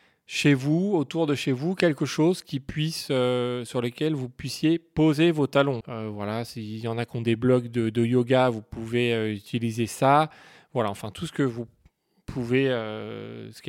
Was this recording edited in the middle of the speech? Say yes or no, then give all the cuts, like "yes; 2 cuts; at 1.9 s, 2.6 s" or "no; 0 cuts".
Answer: yes; 1 cut; at 5.8 s